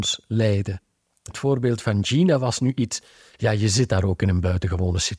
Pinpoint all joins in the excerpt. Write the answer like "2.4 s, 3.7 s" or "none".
1.3 s

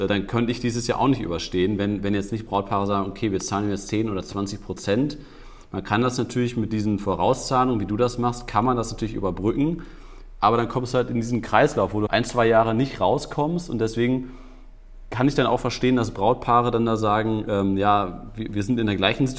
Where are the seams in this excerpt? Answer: 12.1 s

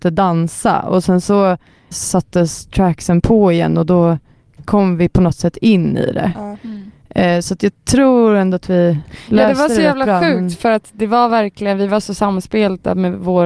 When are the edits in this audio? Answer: 1.9 s

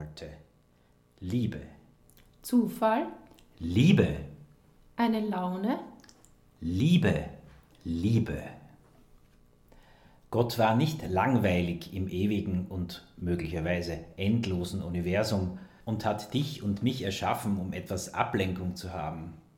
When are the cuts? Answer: 7.7 s

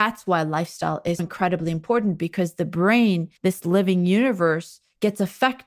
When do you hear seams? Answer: 1.2 s, 3.4 s

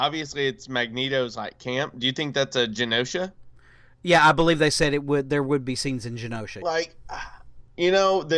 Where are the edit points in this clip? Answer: 6.6 s

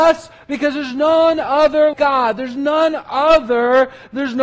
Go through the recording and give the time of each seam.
1.9 s

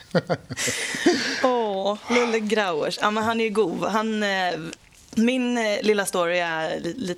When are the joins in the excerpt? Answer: none

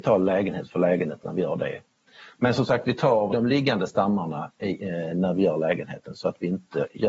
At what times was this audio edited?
3.3 s

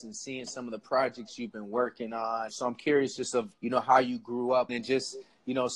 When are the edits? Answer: 2.5 s, 3.5 s, 4.7 s

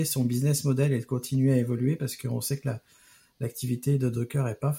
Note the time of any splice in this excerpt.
none

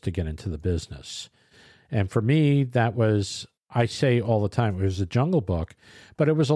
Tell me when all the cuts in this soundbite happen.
3.6 s

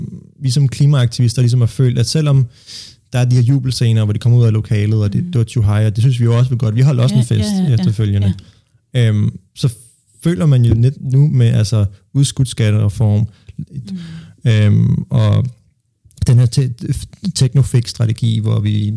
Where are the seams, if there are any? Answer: 13.8 s

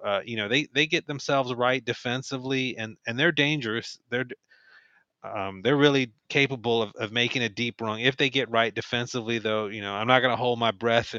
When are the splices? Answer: 6.2 s

